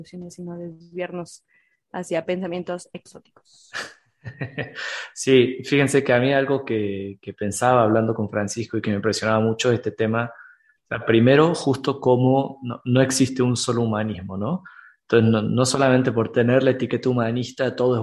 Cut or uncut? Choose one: uncut